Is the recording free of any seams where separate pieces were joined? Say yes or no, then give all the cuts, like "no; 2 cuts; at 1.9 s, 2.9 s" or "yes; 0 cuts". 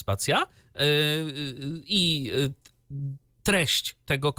yes; 0 cuts